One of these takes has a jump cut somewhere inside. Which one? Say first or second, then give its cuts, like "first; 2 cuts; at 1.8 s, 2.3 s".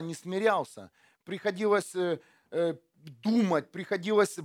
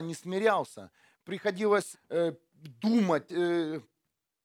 second; 2 cuts; at 1.9 s, 3.3 s